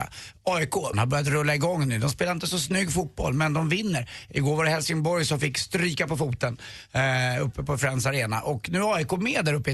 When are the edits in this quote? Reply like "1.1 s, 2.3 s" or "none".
0.9 s